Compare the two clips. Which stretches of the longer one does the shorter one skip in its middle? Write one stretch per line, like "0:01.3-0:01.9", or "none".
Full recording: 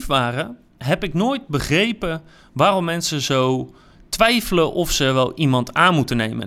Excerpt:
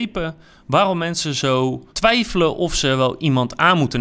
0:03.8-0:04.1

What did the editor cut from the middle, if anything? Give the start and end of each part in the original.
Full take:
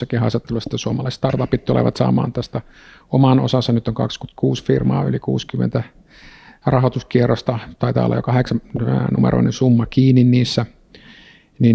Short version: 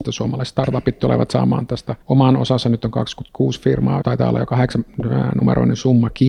0:02.7-0:03.0
0:05.0-0:07.8

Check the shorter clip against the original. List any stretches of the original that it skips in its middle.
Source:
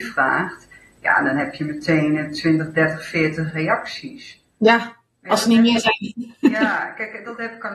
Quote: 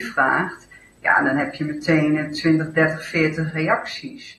none

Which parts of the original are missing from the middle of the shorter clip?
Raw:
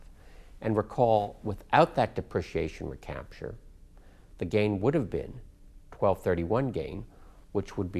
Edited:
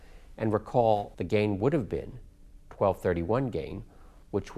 0:01.4-0:04.4

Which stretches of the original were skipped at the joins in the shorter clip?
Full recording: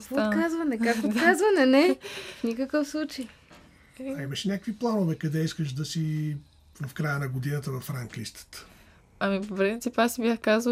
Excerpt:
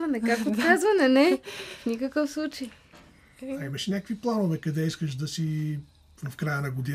none

